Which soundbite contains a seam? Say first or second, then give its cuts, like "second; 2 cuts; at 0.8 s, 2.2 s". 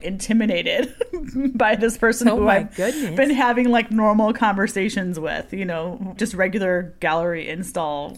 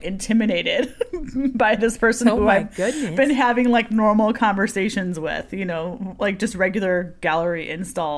first; 1 cut; at 6.2 s